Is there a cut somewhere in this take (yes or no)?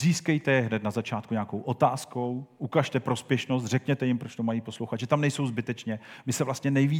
no